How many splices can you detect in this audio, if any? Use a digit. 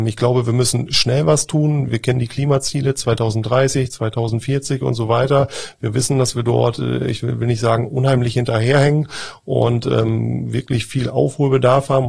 0